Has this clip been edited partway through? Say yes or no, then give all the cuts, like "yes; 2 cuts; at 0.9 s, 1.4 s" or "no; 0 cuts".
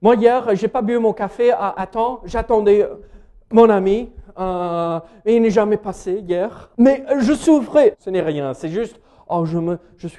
yes; 2 cuts; at 6.7 s, 7.9 s